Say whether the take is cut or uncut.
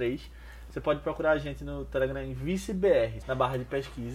cut